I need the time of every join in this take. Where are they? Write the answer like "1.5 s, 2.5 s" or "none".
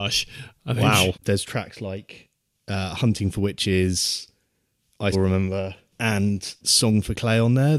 1.1 s, 5.1 s